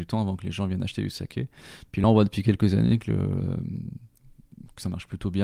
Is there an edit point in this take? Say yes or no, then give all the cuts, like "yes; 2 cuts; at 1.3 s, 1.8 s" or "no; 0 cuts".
no; 0 cuts